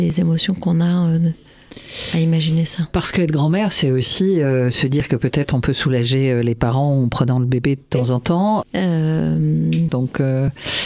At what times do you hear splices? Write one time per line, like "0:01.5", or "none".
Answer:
0:08.6
0:09.9